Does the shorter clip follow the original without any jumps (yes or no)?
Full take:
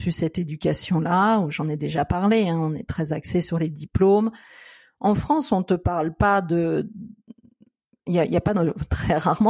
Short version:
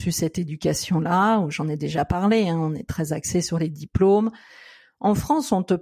yes